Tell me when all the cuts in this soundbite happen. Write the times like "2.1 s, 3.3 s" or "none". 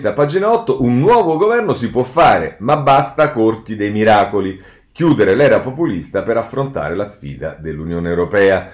none